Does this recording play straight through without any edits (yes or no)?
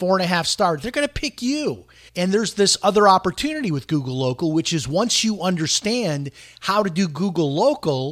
no